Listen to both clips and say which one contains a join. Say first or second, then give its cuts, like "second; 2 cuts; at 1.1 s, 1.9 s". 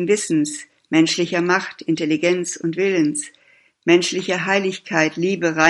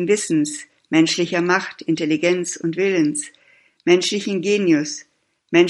first; 1 cut; at 3.7 s